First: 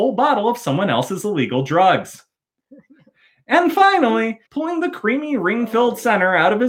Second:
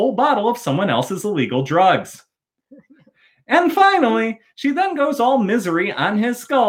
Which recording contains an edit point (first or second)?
first